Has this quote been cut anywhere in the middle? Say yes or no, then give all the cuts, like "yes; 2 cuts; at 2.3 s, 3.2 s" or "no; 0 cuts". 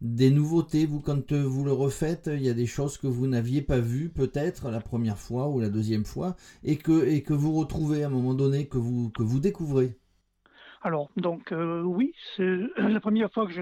no; 0 cuts